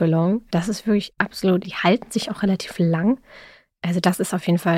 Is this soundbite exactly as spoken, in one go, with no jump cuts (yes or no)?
no